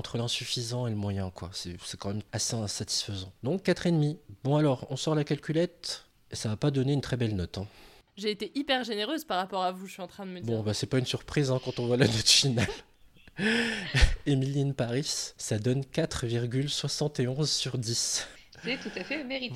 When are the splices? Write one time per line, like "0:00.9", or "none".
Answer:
none